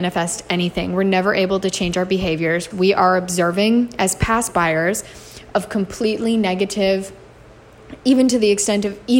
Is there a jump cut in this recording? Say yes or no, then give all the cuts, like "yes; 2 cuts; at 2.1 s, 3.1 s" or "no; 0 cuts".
yes; 1 cut; at 2.7 s